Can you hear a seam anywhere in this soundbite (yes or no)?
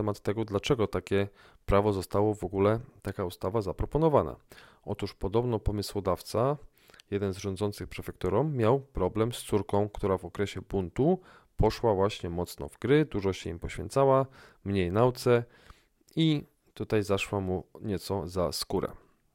no